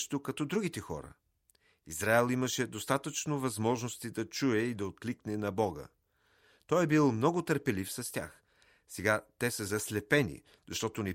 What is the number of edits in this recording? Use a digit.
0